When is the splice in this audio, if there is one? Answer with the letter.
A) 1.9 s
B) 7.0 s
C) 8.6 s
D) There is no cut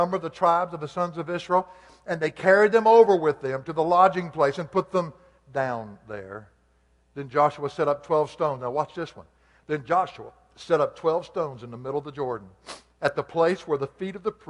D